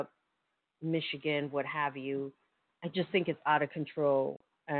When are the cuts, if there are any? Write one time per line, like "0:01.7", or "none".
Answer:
none